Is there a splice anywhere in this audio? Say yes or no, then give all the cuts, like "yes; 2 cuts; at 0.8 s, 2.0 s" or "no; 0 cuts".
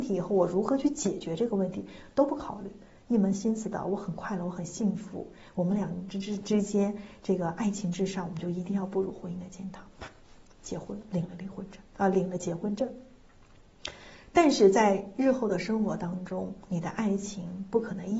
no; 0 cuts